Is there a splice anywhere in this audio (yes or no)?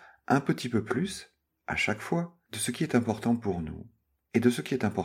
no